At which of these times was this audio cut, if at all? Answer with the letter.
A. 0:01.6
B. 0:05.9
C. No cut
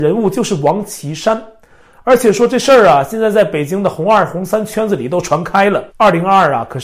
B